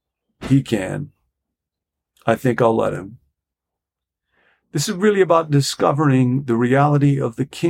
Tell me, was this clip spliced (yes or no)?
no